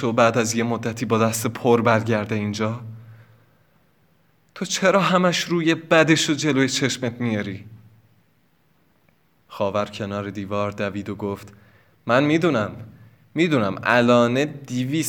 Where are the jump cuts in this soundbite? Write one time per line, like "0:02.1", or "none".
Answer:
0:09.4